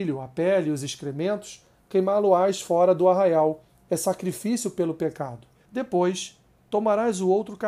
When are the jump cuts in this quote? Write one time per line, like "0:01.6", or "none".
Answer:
0:05.7